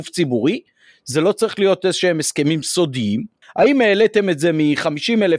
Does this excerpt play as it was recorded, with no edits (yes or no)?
no